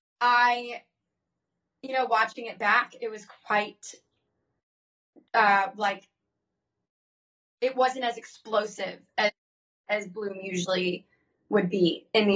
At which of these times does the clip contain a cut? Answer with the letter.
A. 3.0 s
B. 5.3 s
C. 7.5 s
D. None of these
D